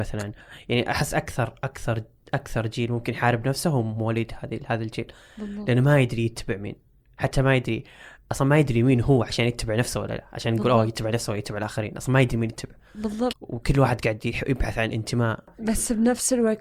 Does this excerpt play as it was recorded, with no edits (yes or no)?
no